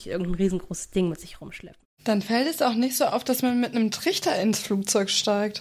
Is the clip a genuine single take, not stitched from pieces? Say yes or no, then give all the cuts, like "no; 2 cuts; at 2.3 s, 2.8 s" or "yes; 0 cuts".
yes; 0 cuts